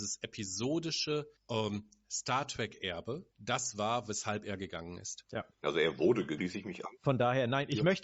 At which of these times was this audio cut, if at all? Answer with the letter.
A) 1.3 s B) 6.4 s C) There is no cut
B